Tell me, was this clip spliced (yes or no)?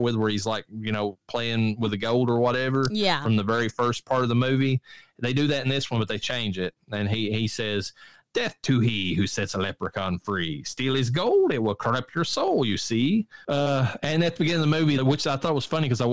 yes